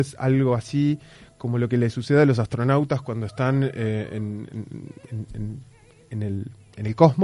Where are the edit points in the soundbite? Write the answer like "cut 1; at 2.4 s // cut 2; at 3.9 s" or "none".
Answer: none